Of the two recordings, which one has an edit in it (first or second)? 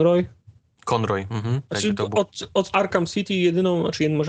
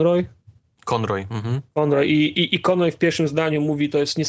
first